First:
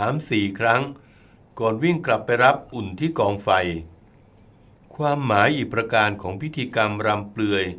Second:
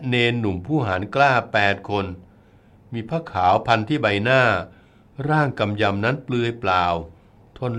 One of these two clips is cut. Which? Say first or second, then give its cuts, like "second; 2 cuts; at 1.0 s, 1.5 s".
first; 1 cut; at 2.7 s